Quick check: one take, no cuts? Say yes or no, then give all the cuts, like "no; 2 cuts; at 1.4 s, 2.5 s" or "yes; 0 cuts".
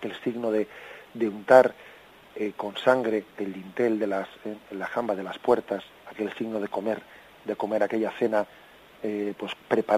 no; 2 cuts; at 3.3 s, 6.0 s